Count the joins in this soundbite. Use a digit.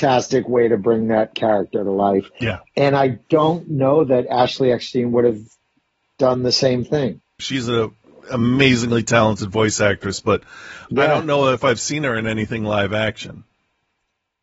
1